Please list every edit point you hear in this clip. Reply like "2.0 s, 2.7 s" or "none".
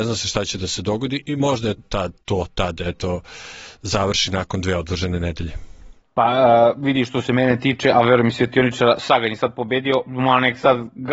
1.8 s